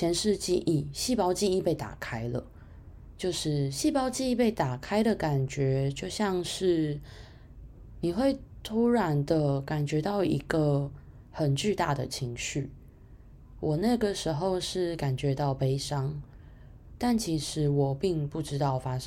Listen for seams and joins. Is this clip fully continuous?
yes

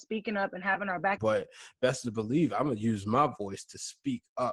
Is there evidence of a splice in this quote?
yes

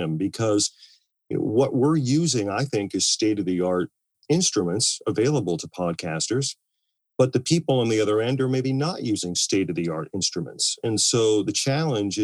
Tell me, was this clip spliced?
no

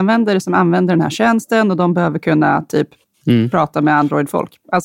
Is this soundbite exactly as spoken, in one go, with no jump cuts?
yes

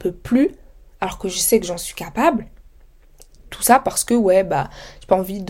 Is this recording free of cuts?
yes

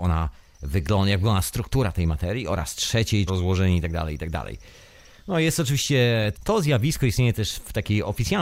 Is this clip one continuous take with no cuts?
no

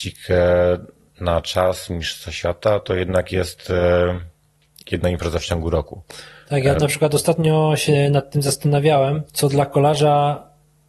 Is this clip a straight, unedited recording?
no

